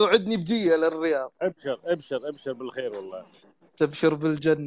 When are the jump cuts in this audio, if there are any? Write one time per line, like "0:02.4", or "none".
none